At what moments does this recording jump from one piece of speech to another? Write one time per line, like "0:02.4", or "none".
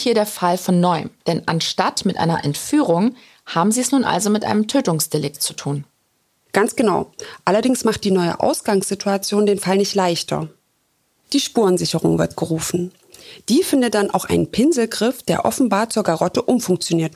none